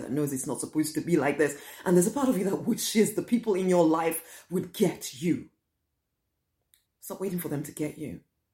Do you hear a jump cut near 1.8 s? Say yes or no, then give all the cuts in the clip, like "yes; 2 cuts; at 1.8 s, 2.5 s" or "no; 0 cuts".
no; 1 cut; at 6.9 s